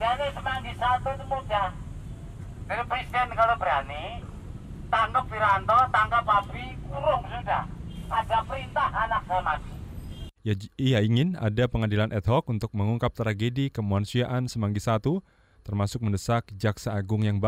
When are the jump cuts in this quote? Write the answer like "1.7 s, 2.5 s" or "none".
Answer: 10.4 s